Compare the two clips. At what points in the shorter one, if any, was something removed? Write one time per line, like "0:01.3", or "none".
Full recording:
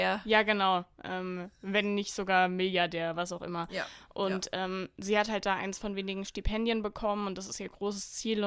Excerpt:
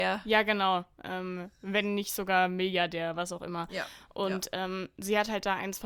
none